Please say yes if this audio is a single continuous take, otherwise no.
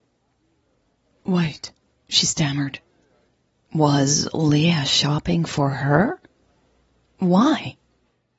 no